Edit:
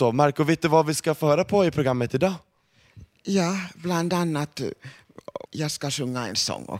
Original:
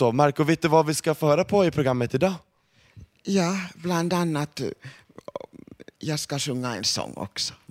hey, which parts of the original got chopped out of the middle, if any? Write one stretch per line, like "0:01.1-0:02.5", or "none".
0:05.5-0:05.9